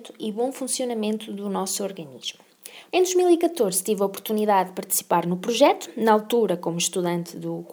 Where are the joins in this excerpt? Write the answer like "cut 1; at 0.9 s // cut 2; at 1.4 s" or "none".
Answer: cut 1; at 2.9 s